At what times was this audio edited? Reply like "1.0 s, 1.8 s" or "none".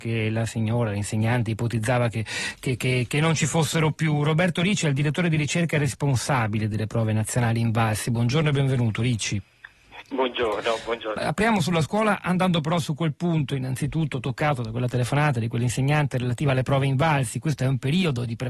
11.2 s